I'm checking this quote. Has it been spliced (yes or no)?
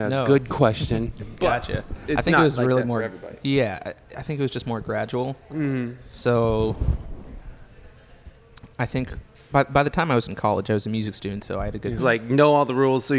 yes